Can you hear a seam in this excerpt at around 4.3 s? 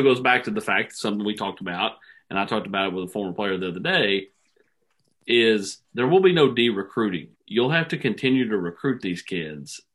no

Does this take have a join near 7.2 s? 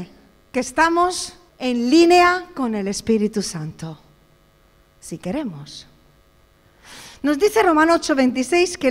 no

